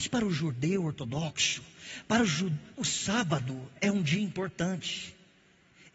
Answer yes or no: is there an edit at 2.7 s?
yes